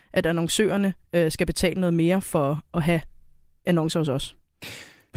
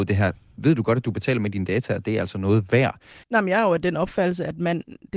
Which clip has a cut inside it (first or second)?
second